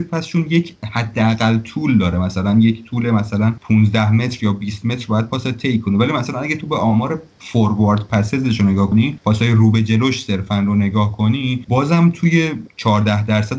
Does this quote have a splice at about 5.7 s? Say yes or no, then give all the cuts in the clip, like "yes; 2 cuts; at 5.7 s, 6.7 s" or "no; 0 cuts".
no; 1 cut; at 8.9 s